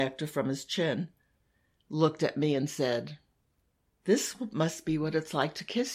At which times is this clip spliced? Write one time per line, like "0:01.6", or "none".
none

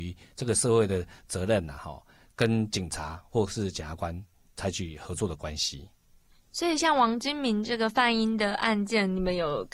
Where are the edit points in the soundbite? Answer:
none

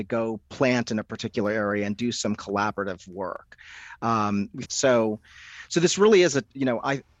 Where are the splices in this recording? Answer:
0:04.6

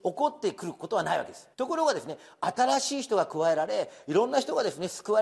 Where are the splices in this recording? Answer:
0:01.5

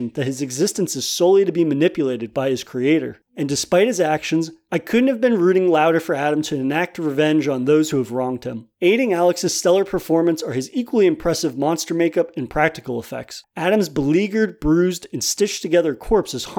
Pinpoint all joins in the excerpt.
none

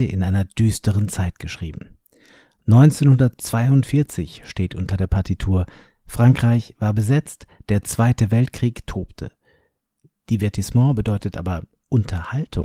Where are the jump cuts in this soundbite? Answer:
none

